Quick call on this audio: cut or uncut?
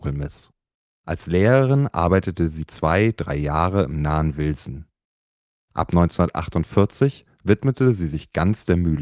uncut